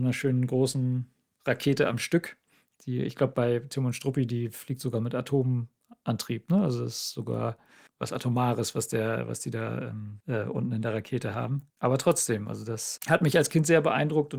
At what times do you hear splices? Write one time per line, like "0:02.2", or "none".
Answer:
0:11.7